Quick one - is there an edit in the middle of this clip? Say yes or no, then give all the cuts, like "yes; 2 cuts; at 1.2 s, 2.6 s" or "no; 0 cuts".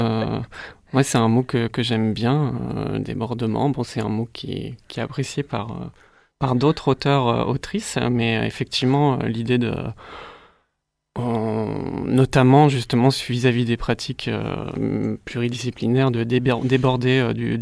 no; 0 cuts